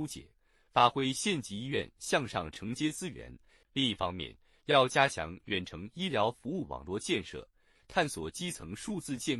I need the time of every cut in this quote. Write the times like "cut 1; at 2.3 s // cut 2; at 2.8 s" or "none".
cut 1; at 3.6 s // cut 2; at 7.8 s

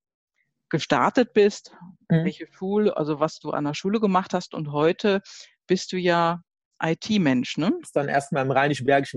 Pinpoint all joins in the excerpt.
cut 1; at 6.7 s // cut 2; at 7.8 s

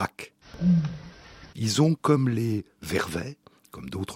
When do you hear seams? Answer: cut 1; at 1.5 s

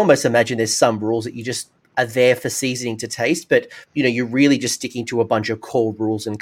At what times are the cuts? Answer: none

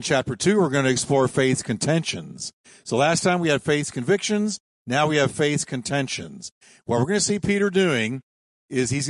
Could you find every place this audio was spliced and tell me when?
none

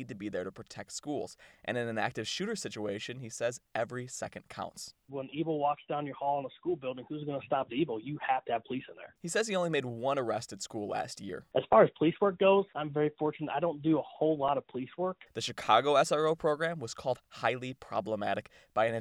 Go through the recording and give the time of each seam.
cut 1; at 9.2 s // cut 2; at 15.3 s

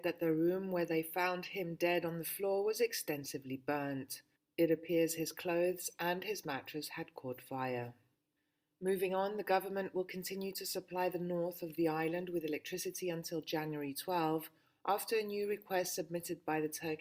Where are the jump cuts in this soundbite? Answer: none

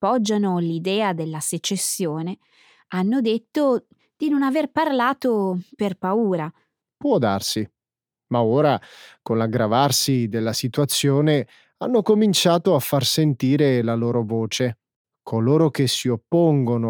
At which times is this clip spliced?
cut 1; at 15.1 s

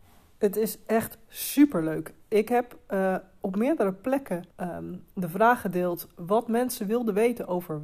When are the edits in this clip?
cut 1; at 4.5 s

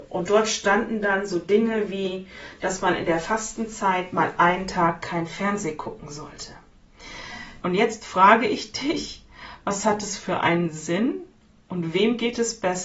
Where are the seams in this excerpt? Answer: cut 1; at 7.6 s

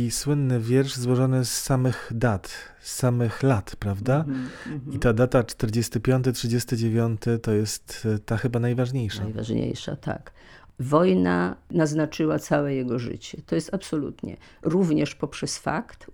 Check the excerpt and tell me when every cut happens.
none

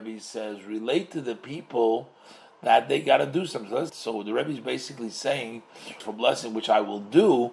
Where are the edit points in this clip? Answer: cut 1; at 3.9 s // cut 2; at 6.0 s

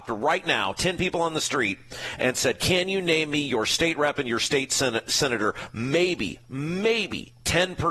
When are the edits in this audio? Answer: none

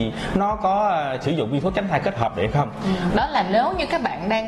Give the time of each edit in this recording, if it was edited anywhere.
cut 1; at 3.1 s

